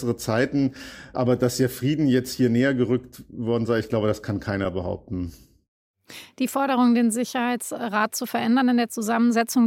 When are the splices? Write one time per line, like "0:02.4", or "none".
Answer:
none